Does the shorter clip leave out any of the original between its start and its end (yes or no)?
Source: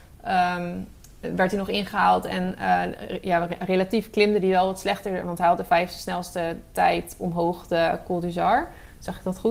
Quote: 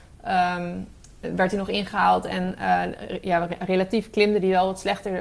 no